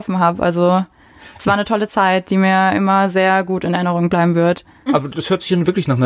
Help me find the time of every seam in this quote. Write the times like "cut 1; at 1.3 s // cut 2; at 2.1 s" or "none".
cut 1; at 4.9 s